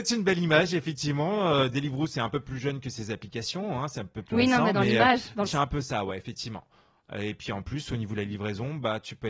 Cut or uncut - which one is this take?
cut